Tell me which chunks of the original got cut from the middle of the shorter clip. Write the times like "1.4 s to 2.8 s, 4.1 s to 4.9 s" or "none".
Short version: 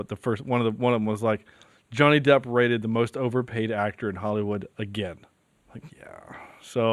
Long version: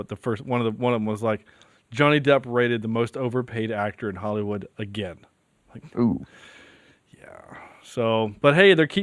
5.9 s to 7.1 s